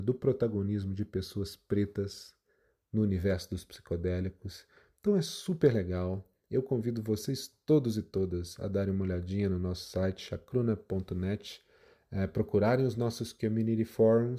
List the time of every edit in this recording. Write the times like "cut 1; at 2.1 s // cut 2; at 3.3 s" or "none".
none